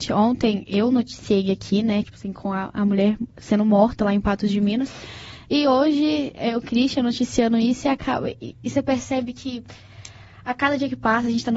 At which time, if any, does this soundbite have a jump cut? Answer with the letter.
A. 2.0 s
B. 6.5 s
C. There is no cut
A